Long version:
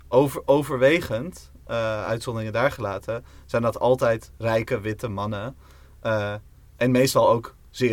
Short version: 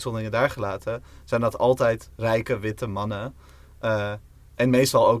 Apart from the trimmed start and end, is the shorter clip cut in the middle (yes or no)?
no